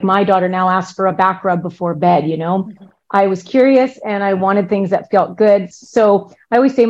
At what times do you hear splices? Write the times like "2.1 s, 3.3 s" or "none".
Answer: 3.0 s, 5.7 s